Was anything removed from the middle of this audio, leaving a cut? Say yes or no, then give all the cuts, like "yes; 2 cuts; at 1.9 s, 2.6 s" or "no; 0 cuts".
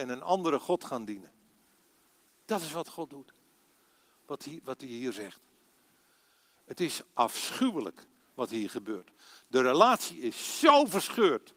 no; 0 cuts